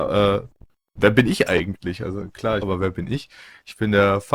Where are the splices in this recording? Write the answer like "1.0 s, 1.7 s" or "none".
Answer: 2.6 s